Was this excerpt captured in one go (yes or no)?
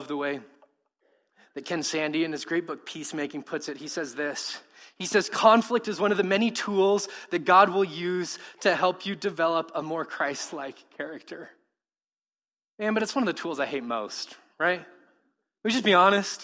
yes